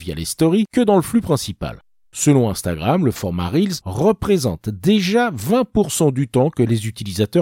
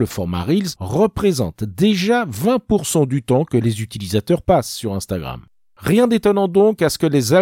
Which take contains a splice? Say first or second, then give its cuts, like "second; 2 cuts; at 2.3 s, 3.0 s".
first; 1 cut; at 2.0 s